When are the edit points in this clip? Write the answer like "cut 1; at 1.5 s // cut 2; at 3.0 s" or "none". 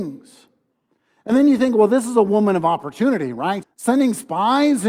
cut 1; at 3.6 s

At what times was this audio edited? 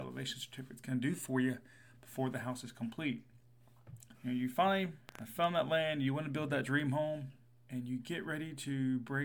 cut 1; at 4.1 s

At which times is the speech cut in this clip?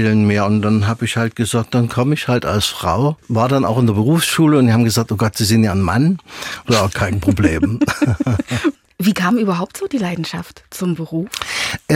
cut 1; at 6.6 s

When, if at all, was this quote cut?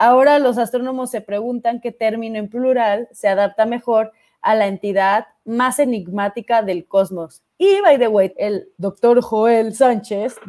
cut 1; at 8.3 s

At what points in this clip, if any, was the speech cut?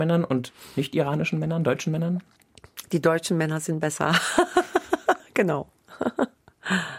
cut 1; at 5.2 s

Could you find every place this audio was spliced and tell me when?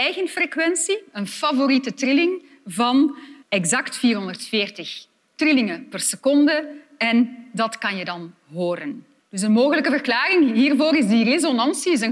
cut 1; at 3.4 s // cut 2; at 9.2 s

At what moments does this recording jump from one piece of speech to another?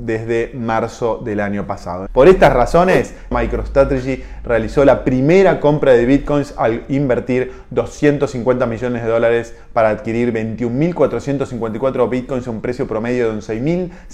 cut 1; at 2.1 s // cut 2; at 3.3 s

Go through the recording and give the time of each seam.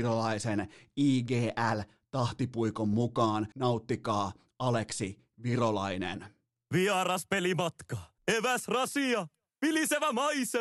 cut 1; at 3.5 s // cut 2; at 8.2 s

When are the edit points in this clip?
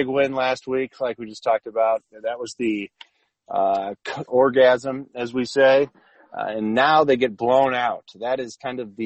cut 1; at 4.3 s

